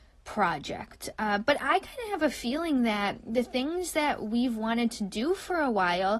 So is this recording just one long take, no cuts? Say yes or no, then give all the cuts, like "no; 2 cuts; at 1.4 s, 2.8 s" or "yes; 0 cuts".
yes; 0 cuts